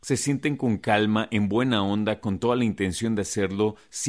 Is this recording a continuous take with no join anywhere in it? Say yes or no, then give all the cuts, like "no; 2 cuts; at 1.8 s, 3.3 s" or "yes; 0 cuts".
yes; 0 cuts